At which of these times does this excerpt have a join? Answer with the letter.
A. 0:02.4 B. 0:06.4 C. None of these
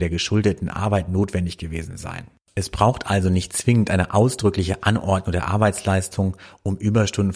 C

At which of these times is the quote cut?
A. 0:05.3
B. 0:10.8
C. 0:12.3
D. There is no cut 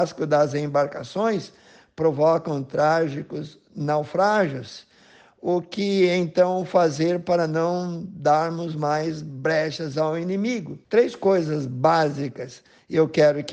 B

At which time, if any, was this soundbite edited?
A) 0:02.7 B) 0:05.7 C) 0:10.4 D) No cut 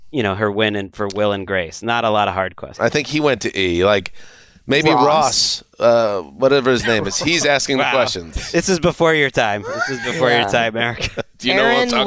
A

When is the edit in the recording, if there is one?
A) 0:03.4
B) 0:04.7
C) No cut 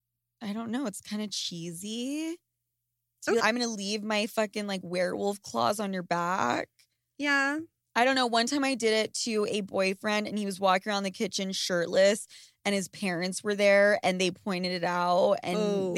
A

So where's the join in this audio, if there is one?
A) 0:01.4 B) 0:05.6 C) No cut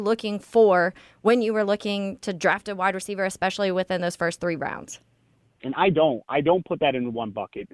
B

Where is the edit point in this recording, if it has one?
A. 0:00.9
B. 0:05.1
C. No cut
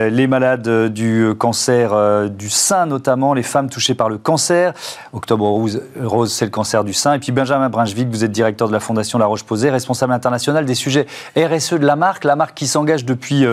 C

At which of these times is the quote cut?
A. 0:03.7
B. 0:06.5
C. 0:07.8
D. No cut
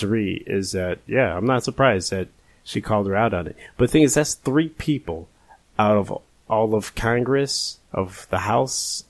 C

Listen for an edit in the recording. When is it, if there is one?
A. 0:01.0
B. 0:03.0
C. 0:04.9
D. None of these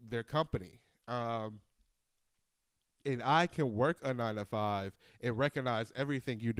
A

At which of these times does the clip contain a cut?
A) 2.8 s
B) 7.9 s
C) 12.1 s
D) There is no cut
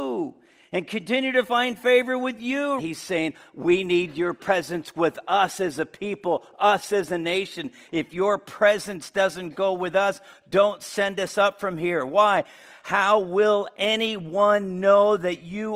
A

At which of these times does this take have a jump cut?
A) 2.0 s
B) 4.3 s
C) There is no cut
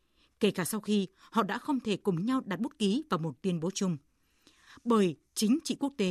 C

